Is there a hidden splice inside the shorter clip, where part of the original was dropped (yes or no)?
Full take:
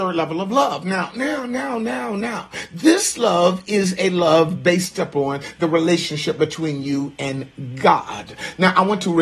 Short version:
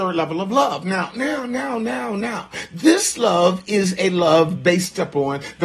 no